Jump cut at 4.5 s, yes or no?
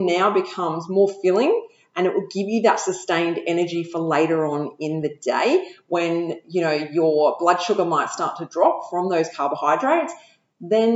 no